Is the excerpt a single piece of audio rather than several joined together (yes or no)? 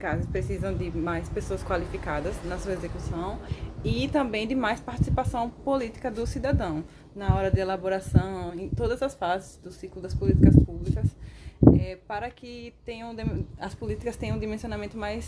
no